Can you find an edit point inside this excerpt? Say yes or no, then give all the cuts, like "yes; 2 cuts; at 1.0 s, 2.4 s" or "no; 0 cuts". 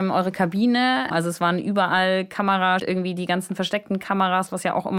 yes; 2 cuts; at 1.1 s, 2.8 s